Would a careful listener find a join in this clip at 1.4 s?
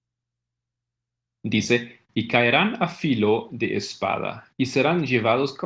yes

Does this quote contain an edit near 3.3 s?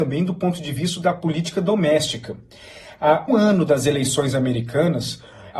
yes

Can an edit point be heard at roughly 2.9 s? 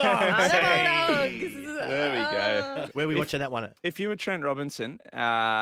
yes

